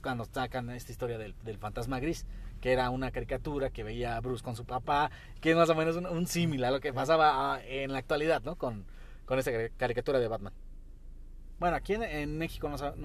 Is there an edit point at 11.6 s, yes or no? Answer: yes